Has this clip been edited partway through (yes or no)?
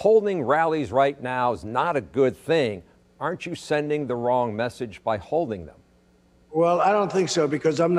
no